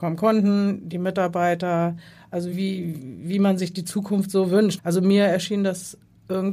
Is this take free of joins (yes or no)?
no